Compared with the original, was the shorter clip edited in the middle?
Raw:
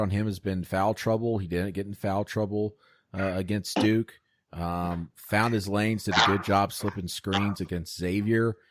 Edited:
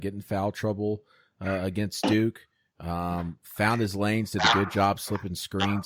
no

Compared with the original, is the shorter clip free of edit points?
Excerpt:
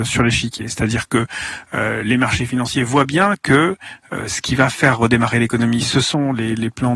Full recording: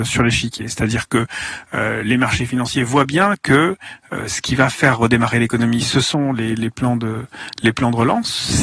yes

